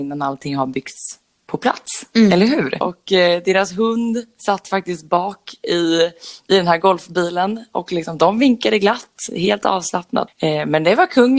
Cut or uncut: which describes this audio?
cut